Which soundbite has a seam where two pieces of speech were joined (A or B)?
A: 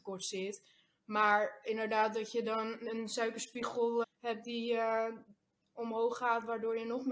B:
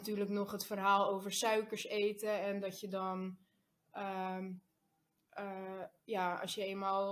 A